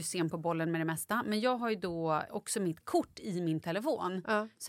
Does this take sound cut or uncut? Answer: cut